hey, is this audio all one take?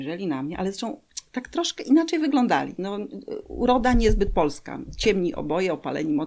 yes; 0 cuts

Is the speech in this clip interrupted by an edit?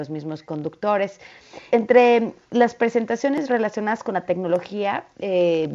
yes; 1 cut; at 1.7 s

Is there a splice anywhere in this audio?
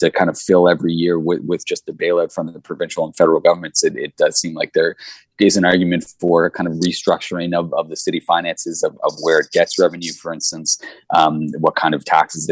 no; 0 cuts

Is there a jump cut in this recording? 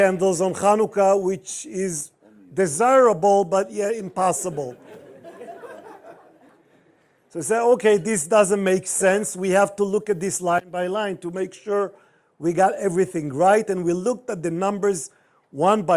no; 0 cuts

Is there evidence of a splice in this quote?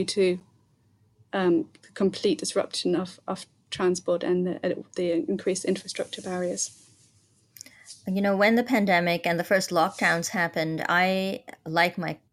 no; 0 cuts

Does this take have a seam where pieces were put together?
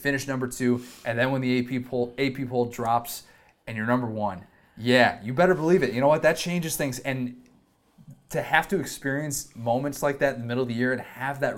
no; 0 cuts

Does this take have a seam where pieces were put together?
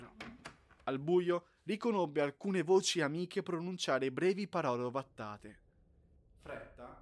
no; 0 cuts

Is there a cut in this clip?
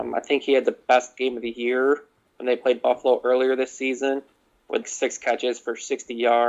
yes; 1 cut; at 4.8 s

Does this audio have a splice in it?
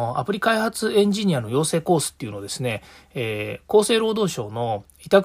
no; 0 cuts

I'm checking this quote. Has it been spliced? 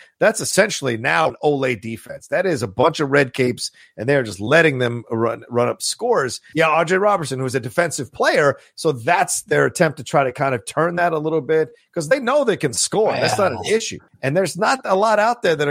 yes; 3 cuts; at 1.3 s, 6.5 s, 14.1 s

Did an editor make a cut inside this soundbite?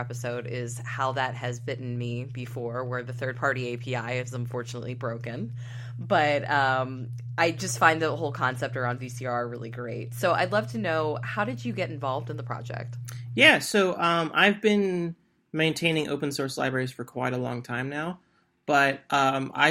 no; 0 cuts

